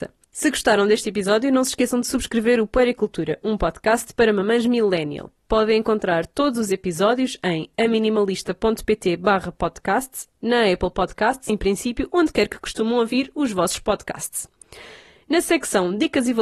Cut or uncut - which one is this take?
cut